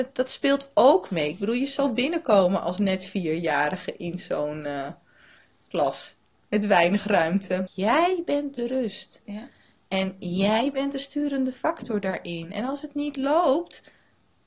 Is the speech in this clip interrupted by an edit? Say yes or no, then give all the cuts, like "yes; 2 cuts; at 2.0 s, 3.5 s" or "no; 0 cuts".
yes; 1 cut; at 7.7 s